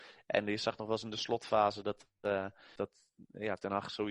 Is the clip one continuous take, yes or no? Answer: no